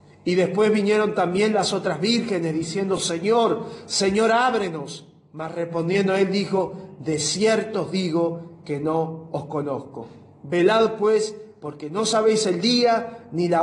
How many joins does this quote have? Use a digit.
0